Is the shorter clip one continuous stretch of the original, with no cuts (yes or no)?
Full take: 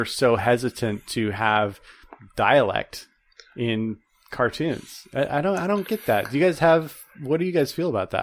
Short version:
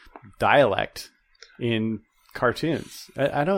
yes